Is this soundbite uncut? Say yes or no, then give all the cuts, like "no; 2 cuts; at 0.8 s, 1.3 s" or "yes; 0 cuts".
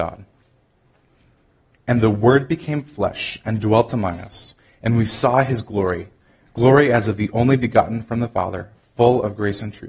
yes; 0 cuts